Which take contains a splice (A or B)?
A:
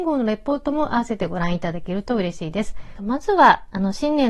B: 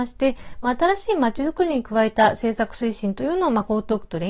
A